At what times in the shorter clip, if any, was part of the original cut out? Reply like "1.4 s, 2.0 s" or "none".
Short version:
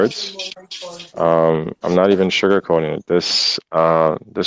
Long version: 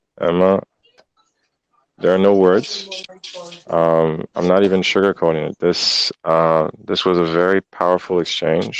none